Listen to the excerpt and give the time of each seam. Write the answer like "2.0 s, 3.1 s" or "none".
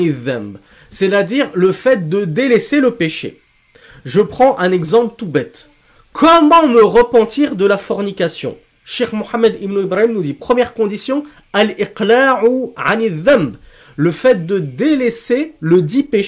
6.0 s